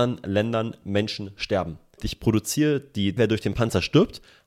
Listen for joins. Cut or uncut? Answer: cut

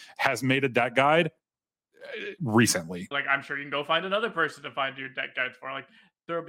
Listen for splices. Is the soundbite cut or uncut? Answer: cut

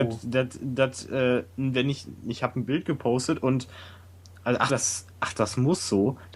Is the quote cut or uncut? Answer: cut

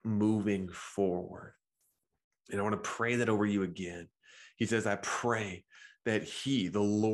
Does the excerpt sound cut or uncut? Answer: uncut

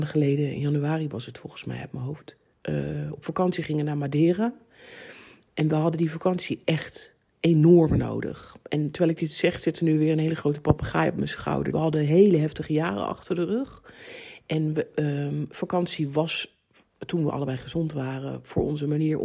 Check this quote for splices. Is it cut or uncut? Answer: cut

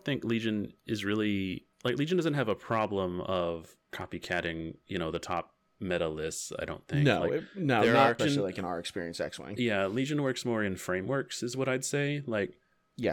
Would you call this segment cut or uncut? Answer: cut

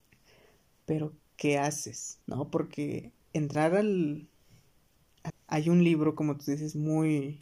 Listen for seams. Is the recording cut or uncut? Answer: cut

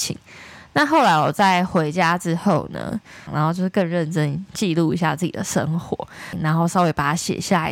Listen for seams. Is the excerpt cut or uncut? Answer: cut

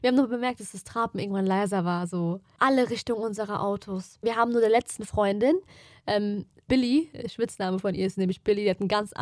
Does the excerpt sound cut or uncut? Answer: cut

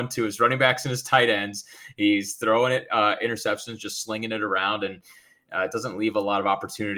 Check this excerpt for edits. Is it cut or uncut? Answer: uncut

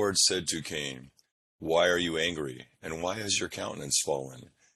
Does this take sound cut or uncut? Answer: uncut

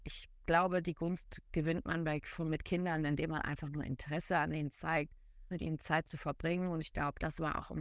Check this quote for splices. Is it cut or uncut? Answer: cut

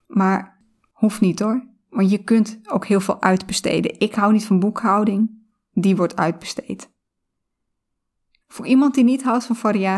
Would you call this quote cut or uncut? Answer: cut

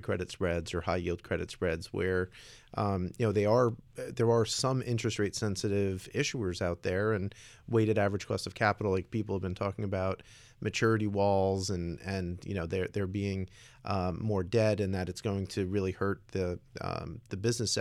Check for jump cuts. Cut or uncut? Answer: uncut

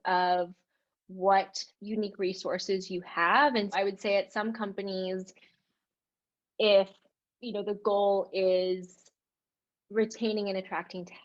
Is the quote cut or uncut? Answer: cut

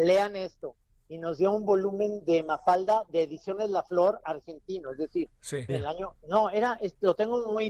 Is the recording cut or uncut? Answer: cut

